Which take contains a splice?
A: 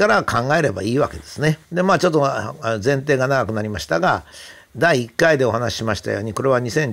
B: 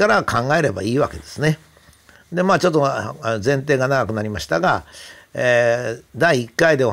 A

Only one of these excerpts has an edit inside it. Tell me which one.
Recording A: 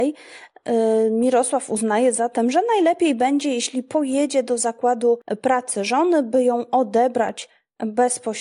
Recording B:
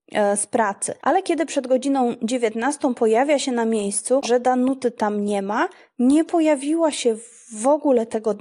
B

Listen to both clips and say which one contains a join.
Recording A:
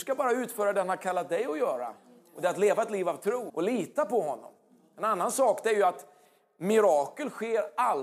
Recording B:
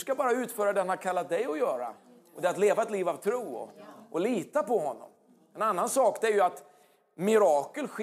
A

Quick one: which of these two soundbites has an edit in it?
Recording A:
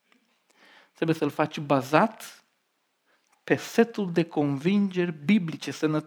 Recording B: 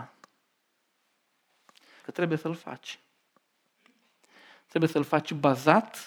B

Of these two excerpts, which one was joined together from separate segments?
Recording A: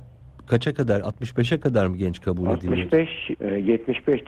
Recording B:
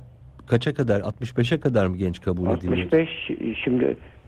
A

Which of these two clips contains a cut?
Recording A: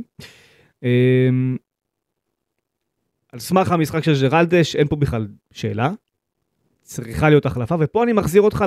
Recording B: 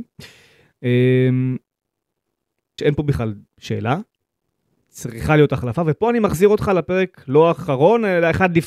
B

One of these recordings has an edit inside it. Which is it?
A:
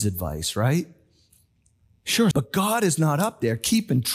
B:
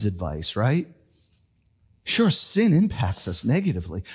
A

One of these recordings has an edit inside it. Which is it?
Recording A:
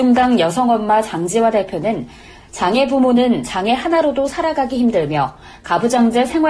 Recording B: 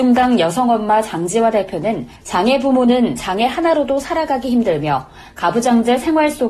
B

